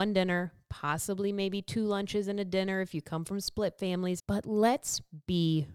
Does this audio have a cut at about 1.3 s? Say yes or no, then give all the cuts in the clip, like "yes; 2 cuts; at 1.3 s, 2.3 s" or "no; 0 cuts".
no; 1 cut; at 4.2 s